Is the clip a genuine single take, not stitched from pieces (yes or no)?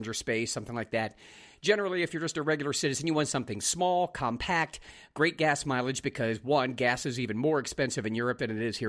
yes